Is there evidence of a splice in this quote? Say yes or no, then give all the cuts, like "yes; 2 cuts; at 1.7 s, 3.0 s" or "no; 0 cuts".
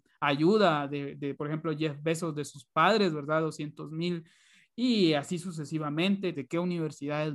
yes; 3 cuts; at 1.3 s, 4.6 s, 6.3 s